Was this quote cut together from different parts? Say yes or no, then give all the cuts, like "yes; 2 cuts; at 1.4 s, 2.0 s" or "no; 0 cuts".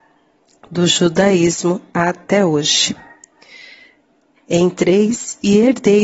yes; 1 cut; at 4.4 s